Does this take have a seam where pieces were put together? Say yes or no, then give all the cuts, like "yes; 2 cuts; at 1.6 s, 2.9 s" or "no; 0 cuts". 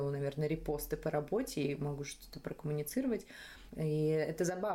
yes; 1 cut; at 3.7 s